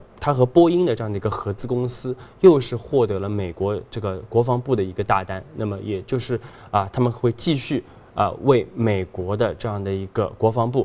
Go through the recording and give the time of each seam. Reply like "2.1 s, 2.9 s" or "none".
none